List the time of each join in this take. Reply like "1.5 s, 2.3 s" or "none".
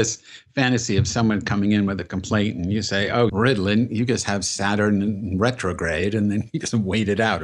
3.3 s